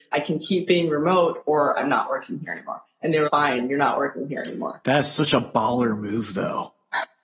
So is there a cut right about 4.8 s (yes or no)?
no